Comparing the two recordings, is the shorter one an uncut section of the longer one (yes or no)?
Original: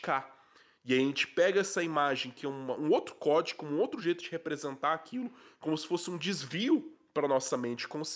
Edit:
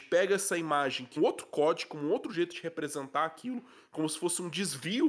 no